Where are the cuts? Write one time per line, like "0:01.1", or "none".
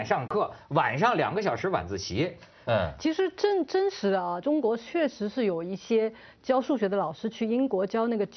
0:02.7
0:04.4